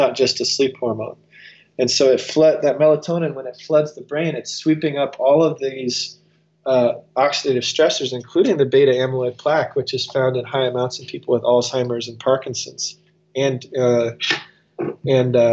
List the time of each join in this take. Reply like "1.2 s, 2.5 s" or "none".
none